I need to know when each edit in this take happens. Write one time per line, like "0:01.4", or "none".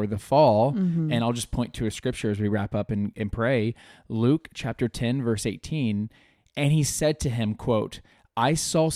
none